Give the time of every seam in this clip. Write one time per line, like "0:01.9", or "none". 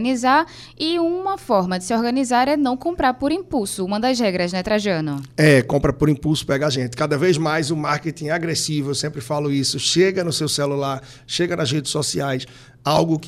none